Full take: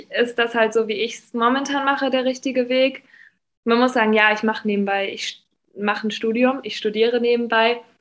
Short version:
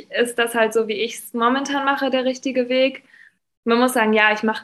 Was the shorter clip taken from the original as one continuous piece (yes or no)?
yes